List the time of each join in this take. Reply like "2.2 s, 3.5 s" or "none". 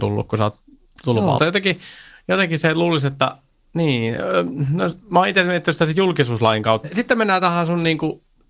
1.4 s, 6.8 s